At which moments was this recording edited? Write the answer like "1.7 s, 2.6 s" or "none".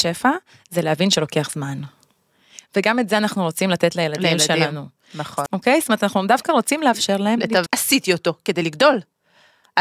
5.5 s, 7.7 s